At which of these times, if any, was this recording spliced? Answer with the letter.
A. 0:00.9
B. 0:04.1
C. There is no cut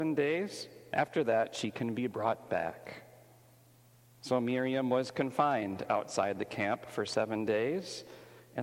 A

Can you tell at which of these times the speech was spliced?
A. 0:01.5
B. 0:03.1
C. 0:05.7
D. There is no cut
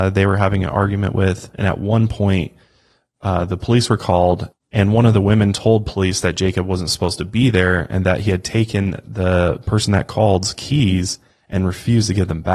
D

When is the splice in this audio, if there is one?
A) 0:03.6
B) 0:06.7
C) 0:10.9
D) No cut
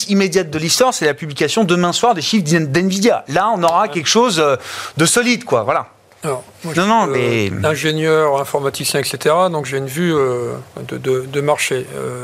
B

